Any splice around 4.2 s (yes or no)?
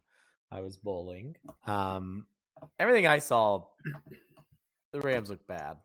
no